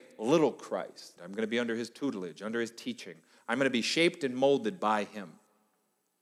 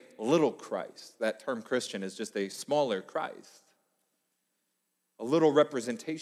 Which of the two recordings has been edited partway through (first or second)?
first